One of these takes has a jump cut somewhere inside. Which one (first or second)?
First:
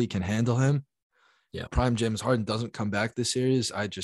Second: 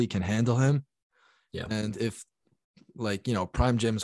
first